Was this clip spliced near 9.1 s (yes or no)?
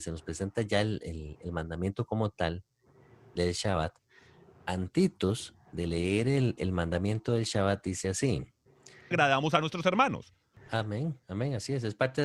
yes